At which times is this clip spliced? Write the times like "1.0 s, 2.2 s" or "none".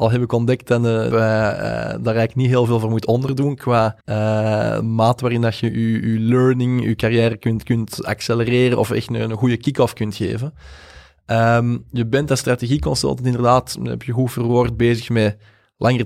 1.1 s, 4.0 s